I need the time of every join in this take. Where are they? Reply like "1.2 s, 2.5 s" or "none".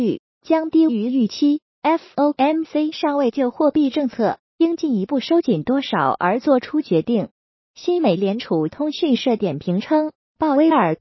none

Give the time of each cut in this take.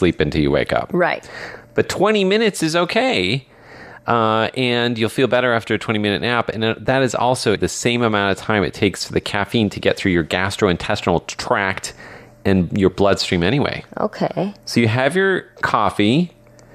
7.6 s

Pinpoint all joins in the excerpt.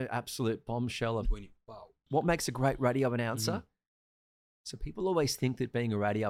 1.2 s, 4.5 s

